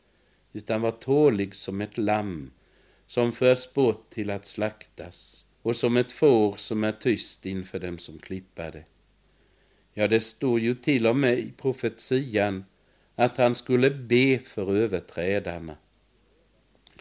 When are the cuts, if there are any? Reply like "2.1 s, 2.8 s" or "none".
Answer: 5.5 s